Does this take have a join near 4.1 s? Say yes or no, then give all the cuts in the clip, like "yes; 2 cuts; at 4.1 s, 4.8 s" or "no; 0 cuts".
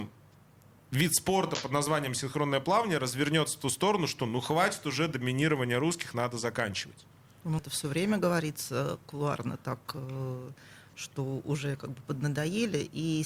no; 1 cut; at 7.6 s